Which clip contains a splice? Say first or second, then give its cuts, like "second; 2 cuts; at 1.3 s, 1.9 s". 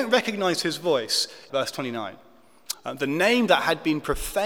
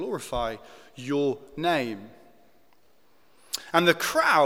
first; 2 cuts; at 1.5 s, 2.7 s